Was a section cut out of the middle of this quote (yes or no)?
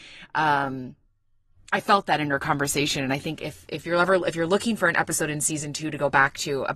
no